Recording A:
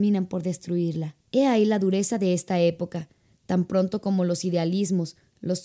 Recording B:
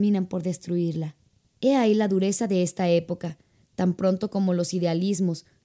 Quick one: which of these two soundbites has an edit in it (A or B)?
A